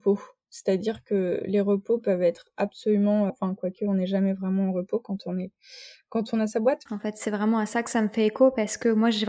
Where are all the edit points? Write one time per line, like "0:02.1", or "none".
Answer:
0:03.3
0:06.9